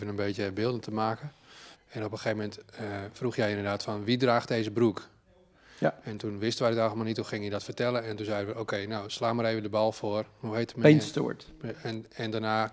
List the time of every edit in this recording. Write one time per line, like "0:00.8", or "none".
0:01.7